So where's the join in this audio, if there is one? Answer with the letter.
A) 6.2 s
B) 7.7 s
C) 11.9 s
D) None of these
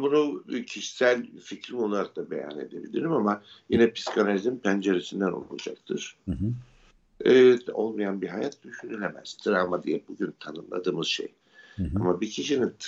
B